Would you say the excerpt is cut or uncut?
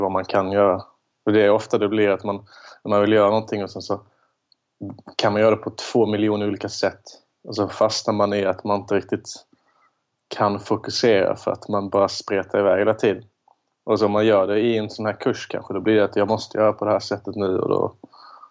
uncut